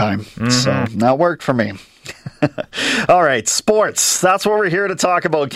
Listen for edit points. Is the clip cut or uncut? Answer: uncut